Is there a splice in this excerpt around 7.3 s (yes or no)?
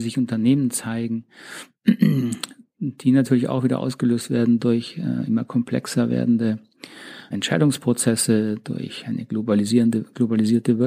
yes